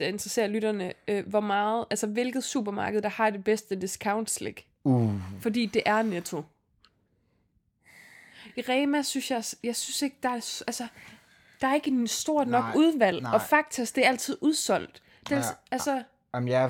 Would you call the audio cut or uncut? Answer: uncut